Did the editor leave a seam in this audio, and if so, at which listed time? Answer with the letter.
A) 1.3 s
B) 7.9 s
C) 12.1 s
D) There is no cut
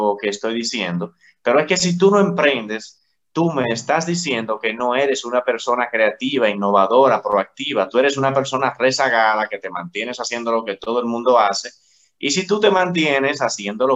D